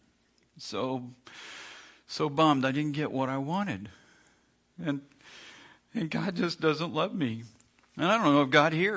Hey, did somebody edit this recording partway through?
no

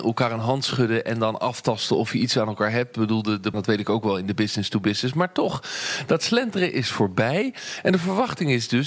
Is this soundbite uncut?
no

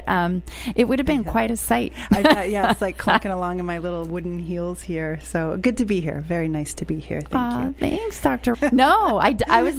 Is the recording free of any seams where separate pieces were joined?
no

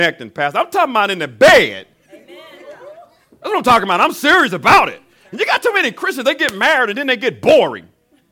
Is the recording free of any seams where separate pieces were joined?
yes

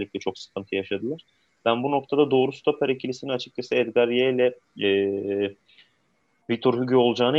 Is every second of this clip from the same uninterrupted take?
yes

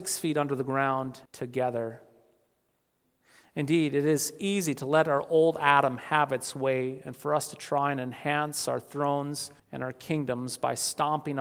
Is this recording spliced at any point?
yes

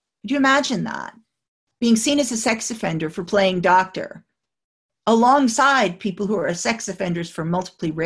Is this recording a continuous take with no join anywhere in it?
yes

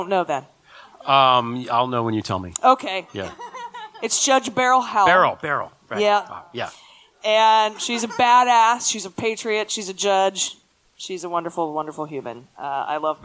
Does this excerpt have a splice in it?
no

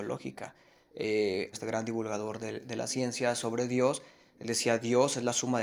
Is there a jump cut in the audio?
yes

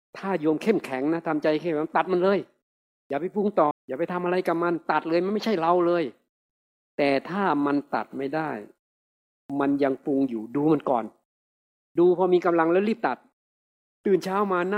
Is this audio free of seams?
no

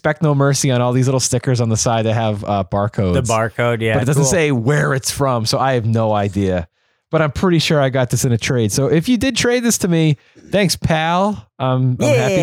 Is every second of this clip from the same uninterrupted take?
yes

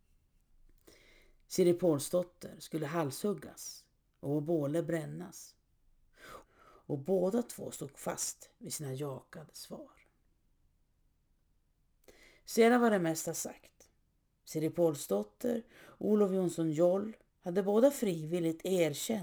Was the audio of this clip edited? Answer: yes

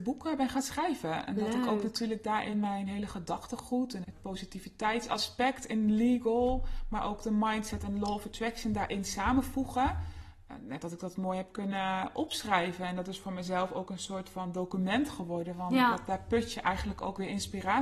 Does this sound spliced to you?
yes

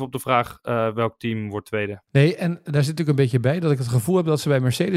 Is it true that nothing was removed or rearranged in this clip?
no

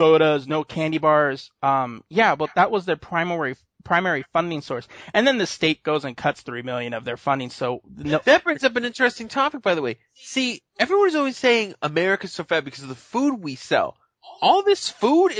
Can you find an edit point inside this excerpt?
no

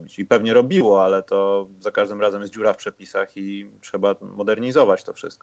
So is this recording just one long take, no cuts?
yes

